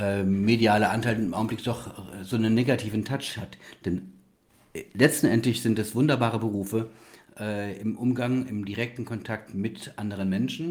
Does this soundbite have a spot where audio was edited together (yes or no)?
no